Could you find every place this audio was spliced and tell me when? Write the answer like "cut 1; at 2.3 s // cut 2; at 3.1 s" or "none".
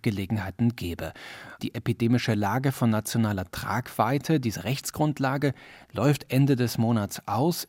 cut 1; at 1.6 s